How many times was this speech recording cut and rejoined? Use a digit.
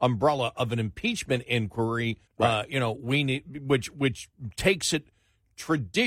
1